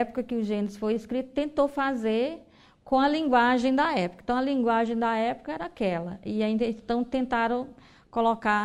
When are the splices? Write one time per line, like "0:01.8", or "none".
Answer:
none